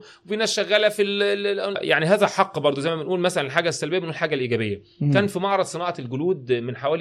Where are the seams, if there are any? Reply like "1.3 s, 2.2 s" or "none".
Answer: 1.7 s